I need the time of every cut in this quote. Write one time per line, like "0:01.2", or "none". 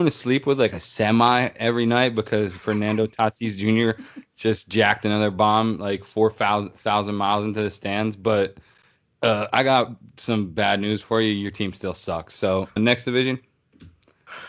0:12.8